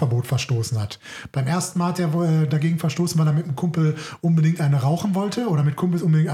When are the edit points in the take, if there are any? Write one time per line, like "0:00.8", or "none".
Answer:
none